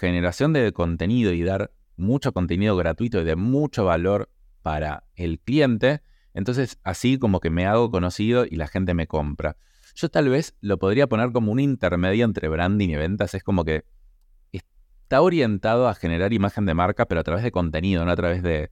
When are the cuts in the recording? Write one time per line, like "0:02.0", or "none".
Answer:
none